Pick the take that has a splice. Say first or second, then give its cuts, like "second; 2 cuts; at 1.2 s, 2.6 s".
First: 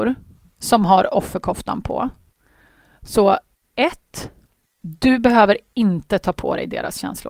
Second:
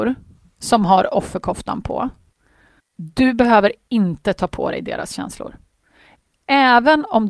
second; 1 cut; at 2.8 s